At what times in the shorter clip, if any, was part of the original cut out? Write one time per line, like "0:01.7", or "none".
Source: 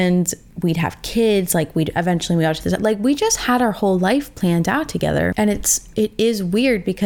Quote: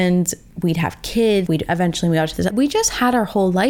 0:01.5
0:02.5